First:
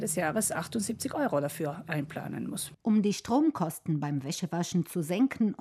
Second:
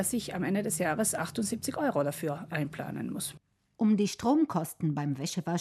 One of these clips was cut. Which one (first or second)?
first